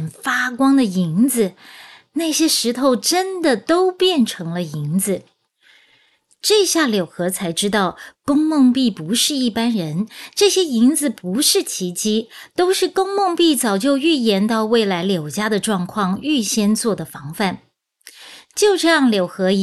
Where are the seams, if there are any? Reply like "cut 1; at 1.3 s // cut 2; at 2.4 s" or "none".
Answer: none